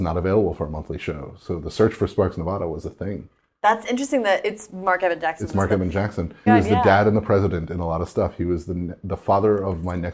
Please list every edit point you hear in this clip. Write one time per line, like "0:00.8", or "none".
0:06.5